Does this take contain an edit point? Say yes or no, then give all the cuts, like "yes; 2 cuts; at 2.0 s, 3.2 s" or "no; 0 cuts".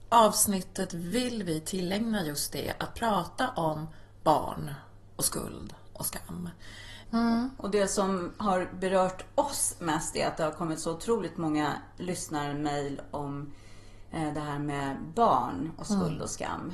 yes; 1 cut; at 7.0 s